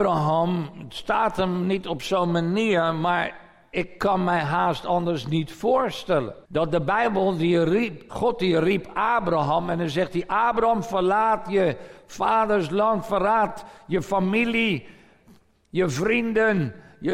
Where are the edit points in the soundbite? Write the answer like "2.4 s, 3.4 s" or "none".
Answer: 6.4 s, 8.1 s